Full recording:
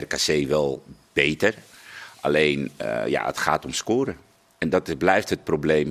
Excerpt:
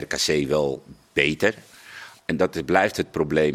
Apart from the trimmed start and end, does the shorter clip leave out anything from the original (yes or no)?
yes